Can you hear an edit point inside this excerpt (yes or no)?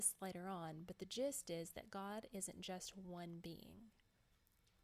no